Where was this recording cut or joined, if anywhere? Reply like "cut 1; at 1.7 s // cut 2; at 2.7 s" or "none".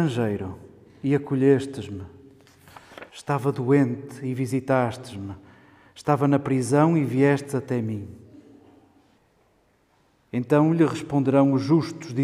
cut 1; at 3.1 s